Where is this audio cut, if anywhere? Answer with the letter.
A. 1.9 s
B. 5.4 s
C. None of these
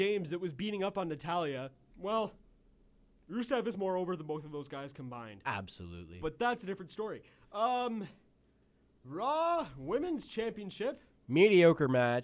A